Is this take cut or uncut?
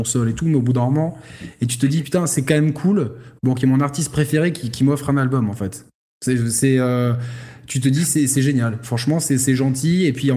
uncut